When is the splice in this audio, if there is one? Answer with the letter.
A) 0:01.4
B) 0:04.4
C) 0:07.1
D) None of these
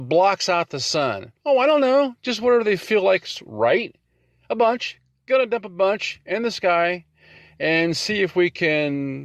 A